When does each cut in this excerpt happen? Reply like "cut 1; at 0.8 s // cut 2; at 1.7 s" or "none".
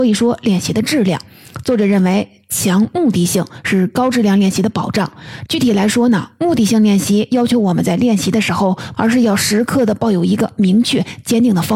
cut 1; at 5.5 s // cut 2; at 8.9 s